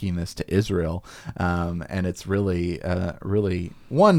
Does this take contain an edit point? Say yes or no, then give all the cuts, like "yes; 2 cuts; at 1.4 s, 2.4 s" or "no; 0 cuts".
no; 0 cuts